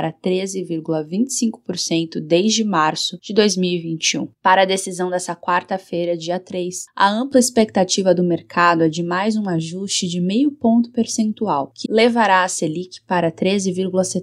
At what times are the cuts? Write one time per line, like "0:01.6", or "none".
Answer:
0:11.8

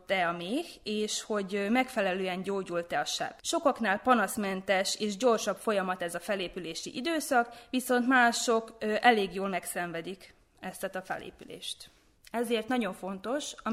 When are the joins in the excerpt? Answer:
0:03.4
0:12.2

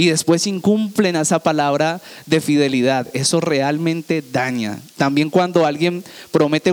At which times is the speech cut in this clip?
none

